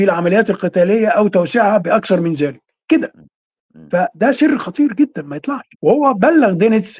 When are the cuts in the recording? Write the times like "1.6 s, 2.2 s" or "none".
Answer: 5.7 s